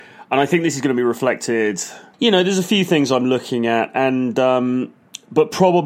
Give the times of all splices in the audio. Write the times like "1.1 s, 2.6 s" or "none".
2.1 s